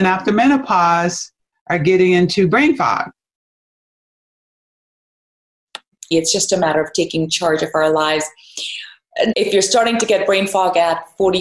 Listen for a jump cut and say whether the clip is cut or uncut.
cut